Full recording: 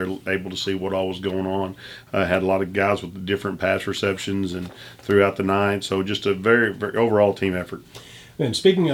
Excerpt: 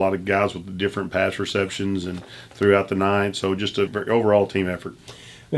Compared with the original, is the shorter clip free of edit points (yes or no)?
no